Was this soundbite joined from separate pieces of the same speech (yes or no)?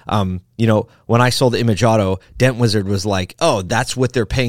no